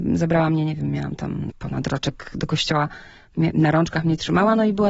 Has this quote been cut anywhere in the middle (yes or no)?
no